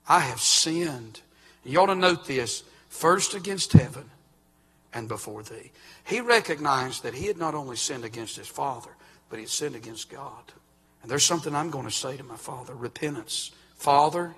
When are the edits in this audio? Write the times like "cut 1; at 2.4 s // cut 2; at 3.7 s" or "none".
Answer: cut 1; at 5.1 s // cut 2; at 10.8 s